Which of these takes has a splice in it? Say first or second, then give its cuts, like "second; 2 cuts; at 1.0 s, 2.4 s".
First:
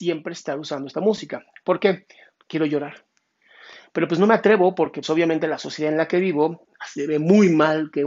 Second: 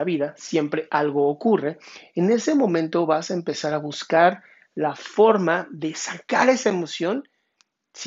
first; 2 cuts; at 2.3 s, 5.0 s